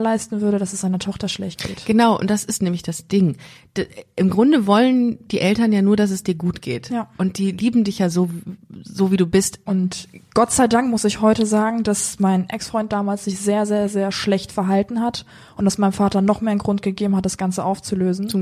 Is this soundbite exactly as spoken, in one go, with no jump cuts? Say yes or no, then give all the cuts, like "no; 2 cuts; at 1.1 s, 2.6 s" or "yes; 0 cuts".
no; 1 cut; at 9.7 s